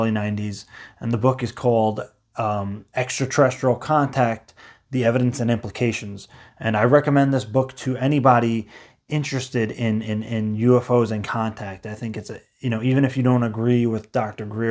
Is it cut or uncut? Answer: uncut